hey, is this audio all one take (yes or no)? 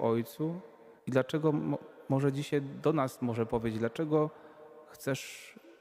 no